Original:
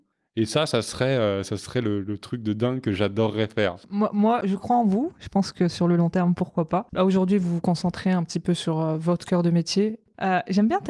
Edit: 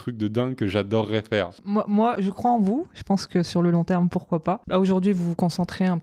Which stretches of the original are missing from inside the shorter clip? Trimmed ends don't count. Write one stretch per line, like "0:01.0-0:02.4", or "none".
none